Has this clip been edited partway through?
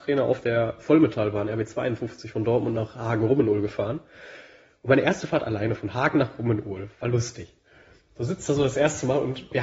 no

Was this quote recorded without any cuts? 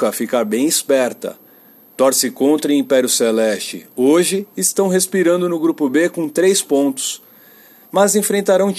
yes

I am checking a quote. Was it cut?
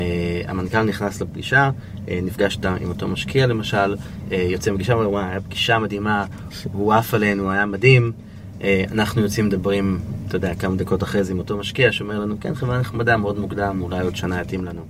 no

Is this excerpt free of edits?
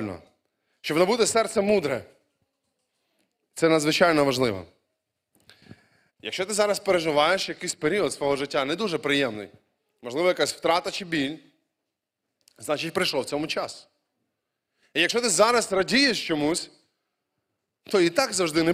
no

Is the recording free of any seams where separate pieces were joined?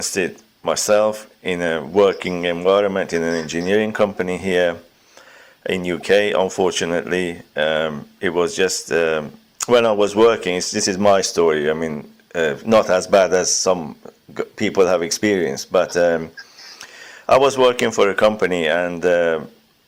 yes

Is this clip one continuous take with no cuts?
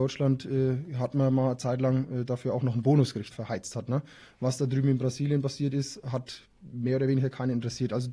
no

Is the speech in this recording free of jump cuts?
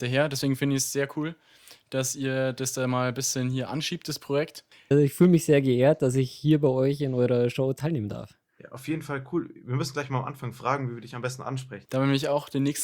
no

